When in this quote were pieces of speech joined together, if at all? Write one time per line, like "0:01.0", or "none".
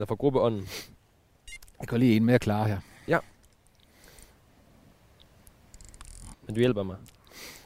0:06.3